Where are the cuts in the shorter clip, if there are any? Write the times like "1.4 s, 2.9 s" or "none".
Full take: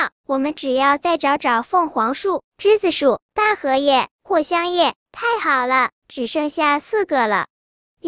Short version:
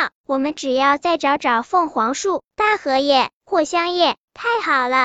2.5 s